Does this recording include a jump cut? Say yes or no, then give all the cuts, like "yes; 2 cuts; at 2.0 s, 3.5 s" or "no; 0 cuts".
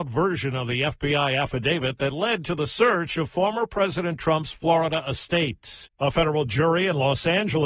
yes; 1 cut; at 5.9 s